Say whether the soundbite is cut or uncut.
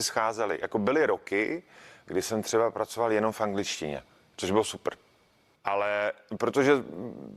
cut